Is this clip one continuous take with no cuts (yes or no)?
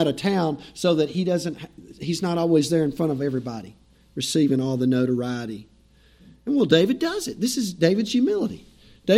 yes